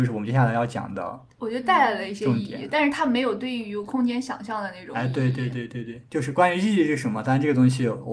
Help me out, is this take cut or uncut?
uncut